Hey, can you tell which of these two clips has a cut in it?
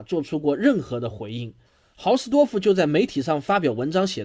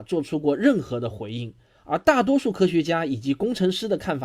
first; 1 cut; at 1.7 s

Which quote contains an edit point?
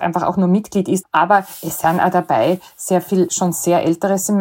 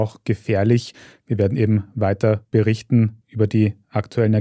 first; 1 cut; at 1.0 s

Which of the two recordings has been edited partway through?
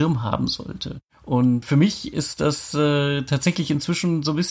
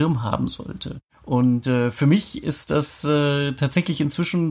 first; 1 cut; at 1.6 s

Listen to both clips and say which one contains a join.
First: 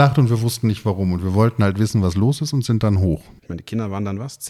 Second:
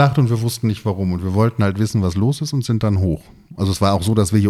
first; 1 cut; at 3.4 s

